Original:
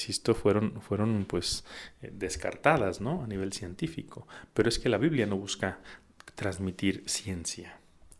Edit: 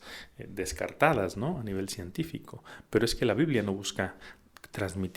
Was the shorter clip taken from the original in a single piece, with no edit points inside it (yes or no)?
yes